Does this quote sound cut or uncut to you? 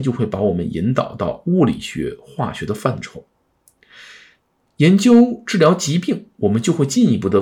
uncut